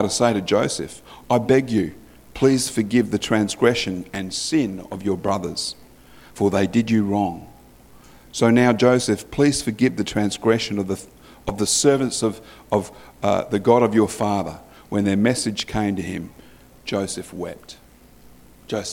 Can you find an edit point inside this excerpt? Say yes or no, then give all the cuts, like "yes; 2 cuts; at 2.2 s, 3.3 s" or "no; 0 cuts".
no; 0 cuts